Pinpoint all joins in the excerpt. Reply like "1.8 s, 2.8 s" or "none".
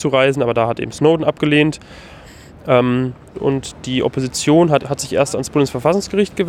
3.3 s, 4.8 s